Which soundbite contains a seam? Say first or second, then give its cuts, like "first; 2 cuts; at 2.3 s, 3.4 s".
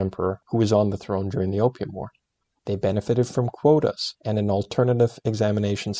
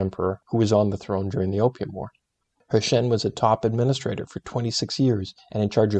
first; 1 cut; at 2.6 s